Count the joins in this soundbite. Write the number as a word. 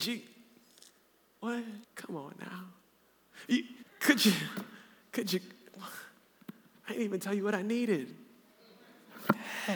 two